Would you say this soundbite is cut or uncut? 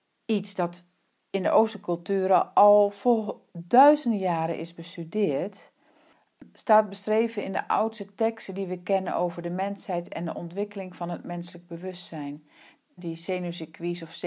cut